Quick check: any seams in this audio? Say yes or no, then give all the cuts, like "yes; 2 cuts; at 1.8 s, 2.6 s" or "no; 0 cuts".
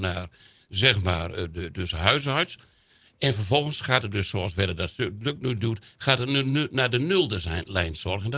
yes; 1 cut; at 1.7 s